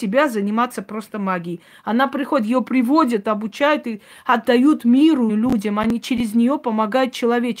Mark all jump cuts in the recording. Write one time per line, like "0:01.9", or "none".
0:03.2
0:05.3